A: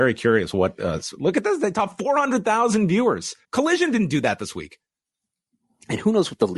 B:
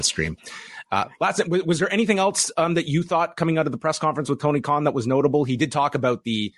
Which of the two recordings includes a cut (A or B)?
A